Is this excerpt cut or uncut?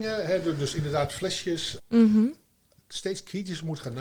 cut